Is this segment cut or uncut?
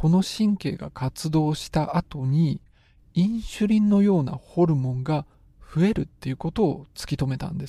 uncut